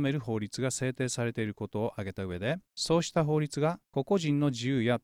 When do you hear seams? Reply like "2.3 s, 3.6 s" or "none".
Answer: 2.7 s, 3.8 s